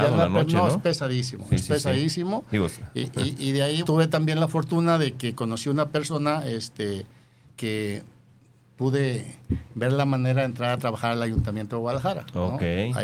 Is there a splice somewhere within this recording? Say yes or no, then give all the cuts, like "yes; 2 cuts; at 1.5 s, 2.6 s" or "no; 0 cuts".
yes; 2 cuts; at 3.8 s, 7.4 s